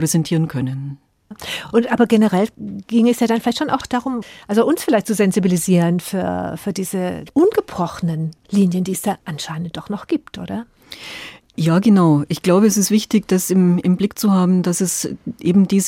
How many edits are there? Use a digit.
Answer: 0